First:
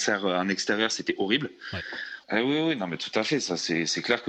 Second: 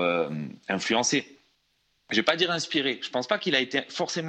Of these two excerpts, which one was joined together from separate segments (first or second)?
first